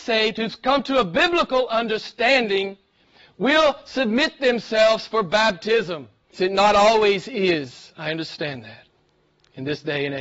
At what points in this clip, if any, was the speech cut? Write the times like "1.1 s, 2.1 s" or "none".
6.3 s